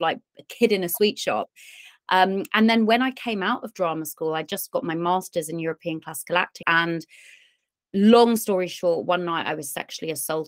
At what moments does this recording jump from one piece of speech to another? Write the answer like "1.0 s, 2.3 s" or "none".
6.6 s